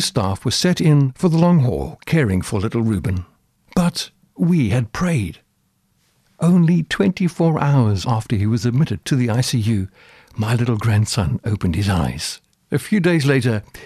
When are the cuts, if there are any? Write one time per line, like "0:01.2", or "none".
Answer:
none